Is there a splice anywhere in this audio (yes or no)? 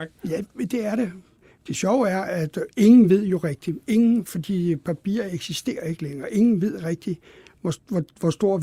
no